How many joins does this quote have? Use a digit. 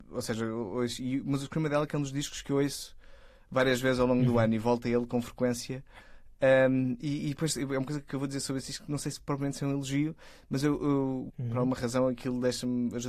1